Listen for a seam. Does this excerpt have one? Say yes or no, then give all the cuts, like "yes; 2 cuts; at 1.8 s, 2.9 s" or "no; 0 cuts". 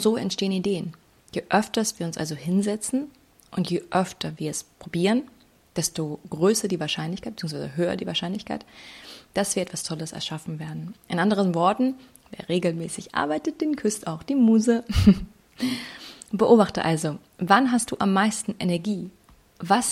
no; 0 cuts